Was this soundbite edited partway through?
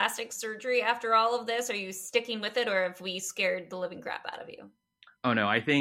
no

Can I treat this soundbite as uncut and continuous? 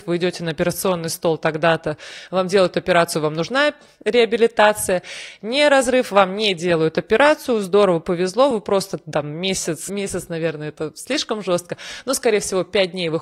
yes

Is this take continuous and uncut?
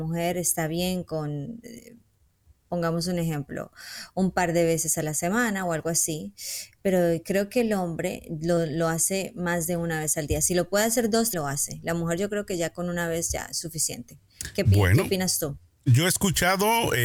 no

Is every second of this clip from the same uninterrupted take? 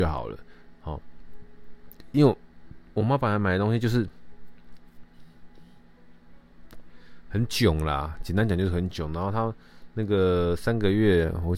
yes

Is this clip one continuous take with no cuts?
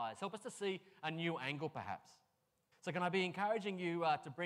no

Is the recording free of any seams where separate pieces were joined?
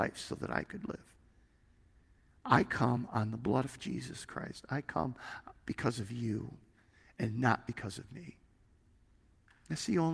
yes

